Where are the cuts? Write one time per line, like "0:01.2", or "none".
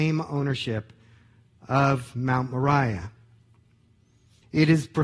none